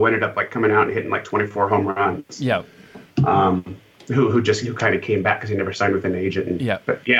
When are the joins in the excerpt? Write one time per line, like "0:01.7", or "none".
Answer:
none